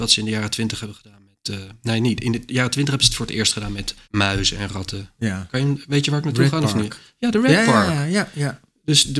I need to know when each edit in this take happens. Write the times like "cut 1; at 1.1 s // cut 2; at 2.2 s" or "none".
cut 1; at 4.0 s